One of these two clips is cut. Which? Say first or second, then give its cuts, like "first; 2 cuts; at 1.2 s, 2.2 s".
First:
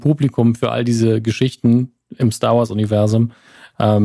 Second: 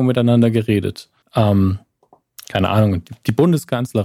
second; 1 cut; at 1.2 s